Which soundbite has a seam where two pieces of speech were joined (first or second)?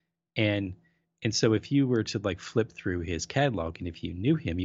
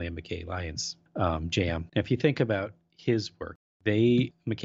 second